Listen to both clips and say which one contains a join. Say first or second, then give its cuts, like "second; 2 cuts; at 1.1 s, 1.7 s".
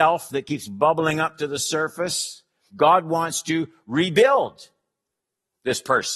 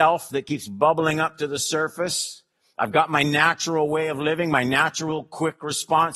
first; 1 cut; at 2.7 s